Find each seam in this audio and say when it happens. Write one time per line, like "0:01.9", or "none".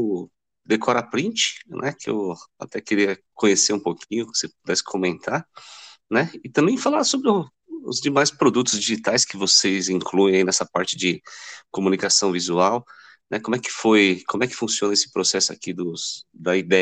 none